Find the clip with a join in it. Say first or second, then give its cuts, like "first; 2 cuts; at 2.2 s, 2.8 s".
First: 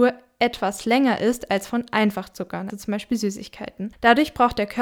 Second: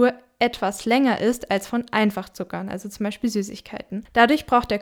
first; 1 cut; at 2.7 s